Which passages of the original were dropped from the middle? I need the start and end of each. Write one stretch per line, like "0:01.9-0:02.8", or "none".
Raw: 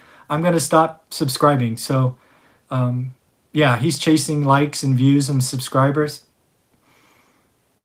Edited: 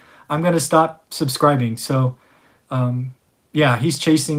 none